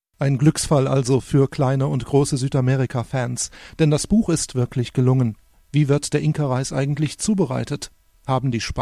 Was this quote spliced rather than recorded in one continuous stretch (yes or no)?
yes